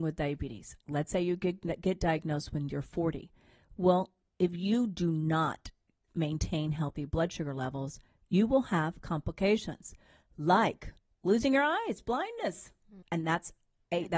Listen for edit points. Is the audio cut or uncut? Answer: cut